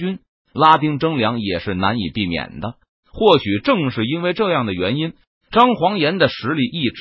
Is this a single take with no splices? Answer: yes; 0 cuts

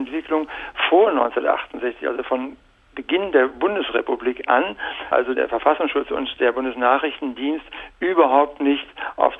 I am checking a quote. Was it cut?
yes; 1 cut; at 5.1 s

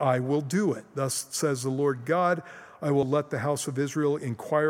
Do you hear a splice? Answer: yes; 1 cut; at 3.0 s

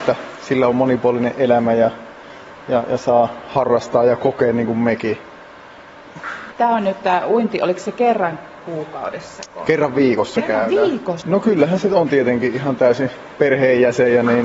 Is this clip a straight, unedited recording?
no; 2 cuts; at 6.5 s, 11.2 s

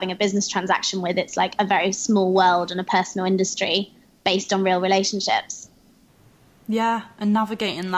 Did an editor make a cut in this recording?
no; 0 cuts

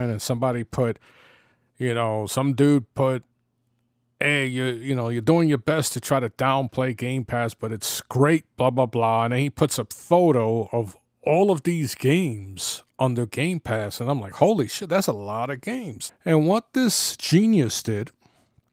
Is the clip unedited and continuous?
no; 1 cut; at 16.1 s

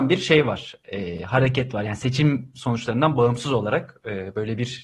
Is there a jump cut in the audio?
no; 0 cuts

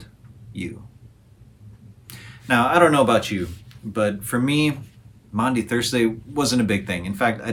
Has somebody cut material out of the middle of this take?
no; 0 cuts

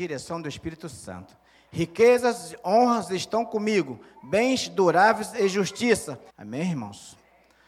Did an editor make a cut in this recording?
yes; 2 cuts; at 1.5 s, 6.3 s

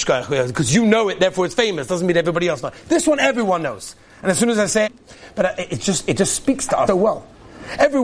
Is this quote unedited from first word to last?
no; 2 cuts; at 4.9 s, 6.9 s

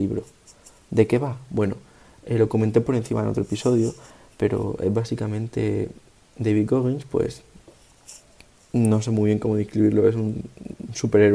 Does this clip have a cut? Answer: no; 0 cuts

